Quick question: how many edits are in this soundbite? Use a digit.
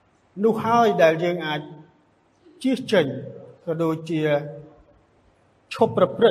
0